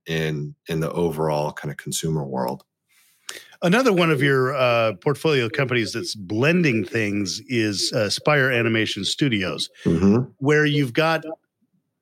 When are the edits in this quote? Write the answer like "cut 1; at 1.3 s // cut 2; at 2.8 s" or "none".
none